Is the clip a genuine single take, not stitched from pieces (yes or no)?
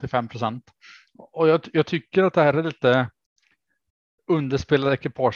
yes